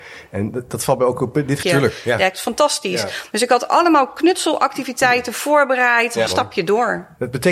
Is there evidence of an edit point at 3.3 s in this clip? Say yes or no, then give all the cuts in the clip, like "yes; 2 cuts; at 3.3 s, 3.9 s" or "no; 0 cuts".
no; 2 cuts; at 1.6 s, 6.3 s